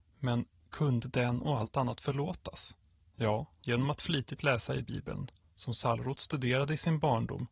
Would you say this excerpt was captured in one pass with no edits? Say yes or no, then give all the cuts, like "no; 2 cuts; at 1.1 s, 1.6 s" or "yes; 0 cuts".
yes; 0 cuts